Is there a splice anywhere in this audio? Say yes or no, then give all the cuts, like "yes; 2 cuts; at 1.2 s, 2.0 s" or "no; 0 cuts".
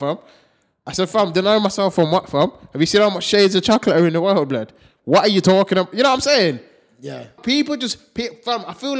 yes; 1 cut; at 7.4 s